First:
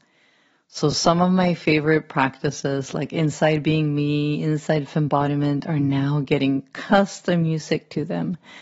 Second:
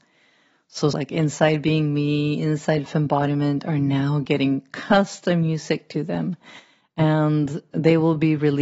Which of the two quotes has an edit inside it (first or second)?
second